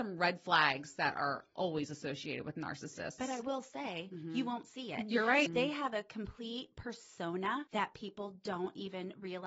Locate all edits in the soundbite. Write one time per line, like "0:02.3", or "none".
0:04.1
0:05.5